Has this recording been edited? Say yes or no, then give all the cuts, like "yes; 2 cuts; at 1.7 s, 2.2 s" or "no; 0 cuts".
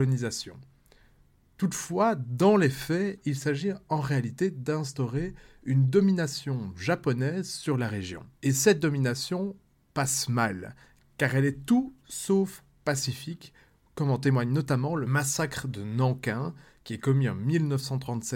yes; 1 cut; at 8.3 s